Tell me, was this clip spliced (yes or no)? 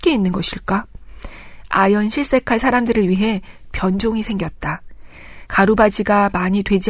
yes